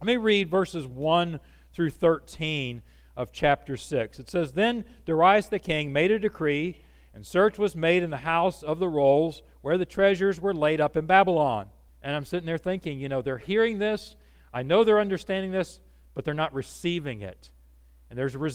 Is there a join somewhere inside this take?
yes; 1 cut; at 11.9 s

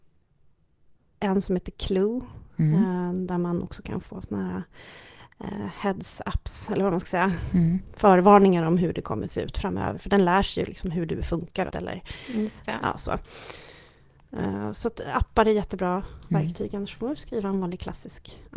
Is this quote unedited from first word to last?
no; 1 cut; at 11.7 s

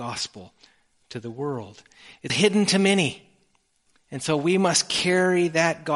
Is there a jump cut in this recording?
yes; 1 cut; at 2.3 s

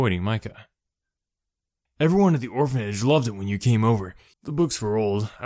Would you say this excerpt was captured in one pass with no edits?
no; 2 cuts; at 1.9 s, 4.3 s

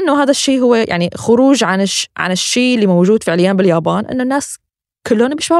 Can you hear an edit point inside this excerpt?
no; 0 cuts

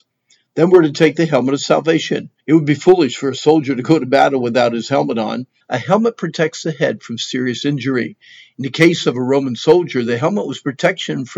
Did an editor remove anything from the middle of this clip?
yes; 2 cuts; at 2.4 s, 5.6 s

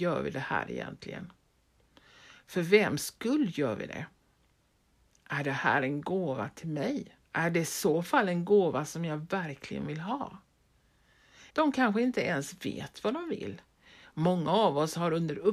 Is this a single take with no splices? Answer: no; 2 cuts; at 7.2 s, 11.5 s

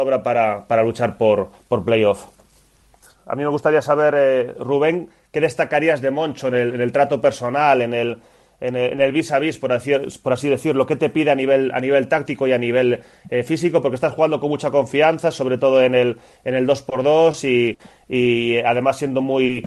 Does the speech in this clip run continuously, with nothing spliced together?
yes; 0 cuts

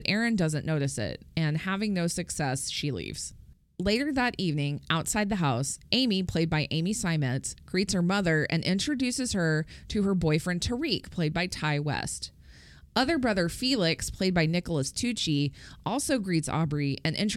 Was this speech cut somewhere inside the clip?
no; 0 cuts

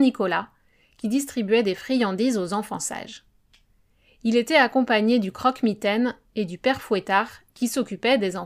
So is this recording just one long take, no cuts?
yes; 0 cuts

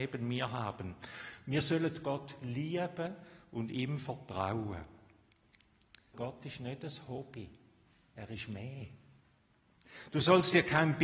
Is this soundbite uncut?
no; 1 cut; at 6.1 s

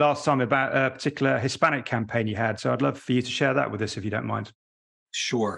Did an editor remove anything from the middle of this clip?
no; 0 cuts

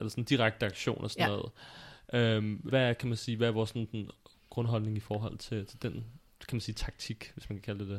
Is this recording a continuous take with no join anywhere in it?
no; 1 cut; at 2.7 s

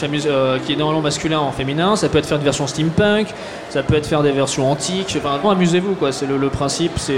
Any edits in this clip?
yes; 1 cut; at 5.4 s

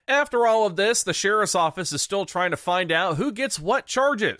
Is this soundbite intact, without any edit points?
yes; 0 cuts

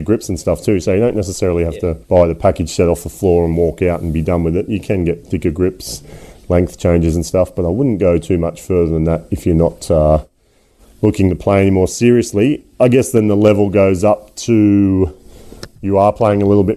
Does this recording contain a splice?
yes; 1 cut; at 2.0 s

